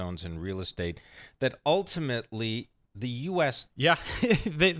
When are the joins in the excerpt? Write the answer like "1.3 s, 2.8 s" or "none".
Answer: 3.7 s